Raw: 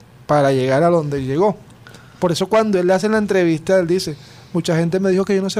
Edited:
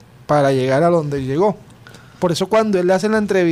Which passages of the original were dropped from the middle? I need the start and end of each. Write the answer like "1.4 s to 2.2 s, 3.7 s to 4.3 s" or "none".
none

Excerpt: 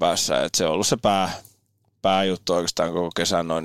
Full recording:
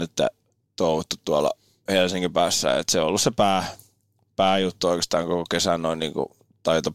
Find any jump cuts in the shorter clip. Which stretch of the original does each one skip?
none

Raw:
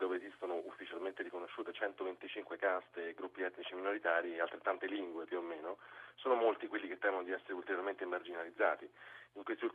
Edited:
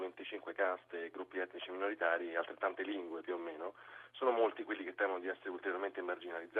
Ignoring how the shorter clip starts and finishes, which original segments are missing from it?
none

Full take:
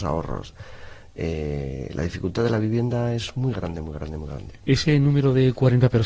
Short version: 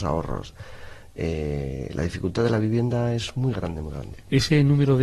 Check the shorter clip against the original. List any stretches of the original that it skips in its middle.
3.7 s to 4.1 s

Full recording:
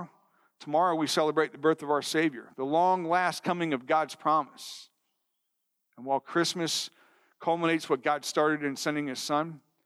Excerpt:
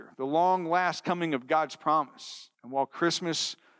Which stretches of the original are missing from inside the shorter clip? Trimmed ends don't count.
4.9 s to 5.9 s

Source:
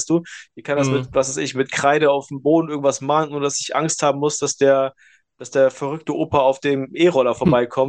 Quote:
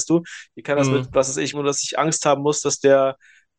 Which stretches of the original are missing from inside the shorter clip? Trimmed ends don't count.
1.5 s to 3.3 s

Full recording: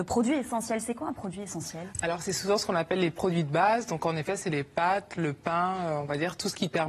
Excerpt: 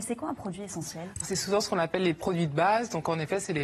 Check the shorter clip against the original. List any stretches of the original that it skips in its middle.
2.0 s to 2.2 s

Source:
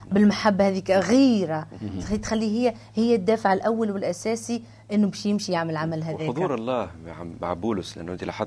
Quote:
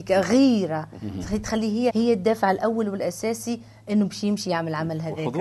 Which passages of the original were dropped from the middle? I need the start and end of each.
2.7 s to 2.9 s

